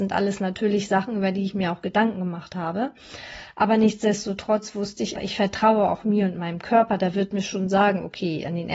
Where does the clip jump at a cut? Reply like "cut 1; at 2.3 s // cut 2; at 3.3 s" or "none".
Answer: cut 1; at 5.2 s